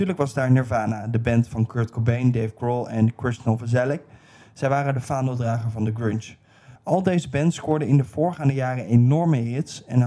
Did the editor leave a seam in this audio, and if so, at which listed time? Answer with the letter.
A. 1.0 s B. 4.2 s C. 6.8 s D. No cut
C